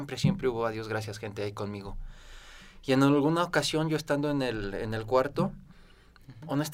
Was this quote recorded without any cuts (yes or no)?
yes